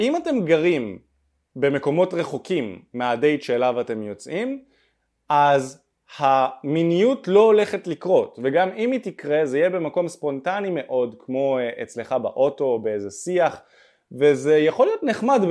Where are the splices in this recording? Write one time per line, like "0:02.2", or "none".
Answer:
none